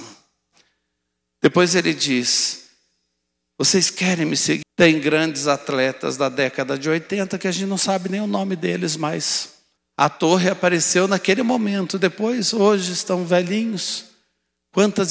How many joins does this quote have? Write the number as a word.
two